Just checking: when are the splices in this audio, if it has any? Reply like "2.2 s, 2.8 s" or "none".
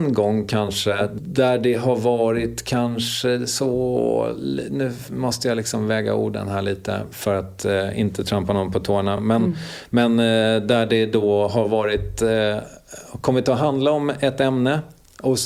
none